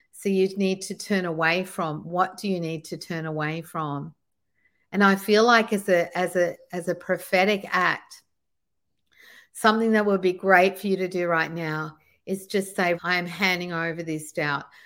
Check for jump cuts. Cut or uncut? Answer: cut